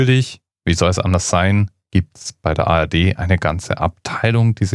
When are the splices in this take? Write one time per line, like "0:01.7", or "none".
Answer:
none